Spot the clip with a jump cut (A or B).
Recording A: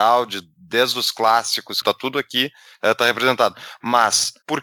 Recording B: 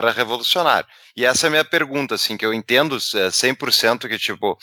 A